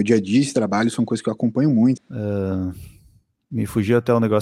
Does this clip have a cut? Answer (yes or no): yes